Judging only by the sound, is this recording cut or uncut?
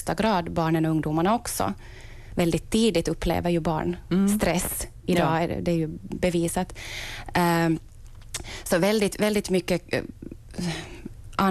uncut